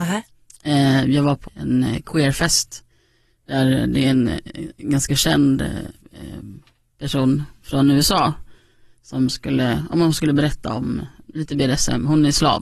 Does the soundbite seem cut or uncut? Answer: cut